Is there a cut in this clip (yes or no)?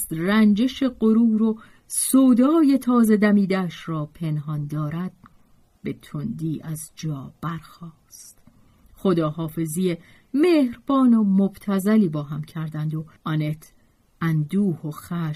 yes